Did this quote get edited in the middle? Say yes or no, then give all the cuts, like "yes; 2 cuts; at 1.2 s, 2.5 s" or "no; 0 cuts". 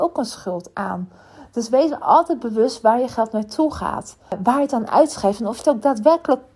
no; 0 cuts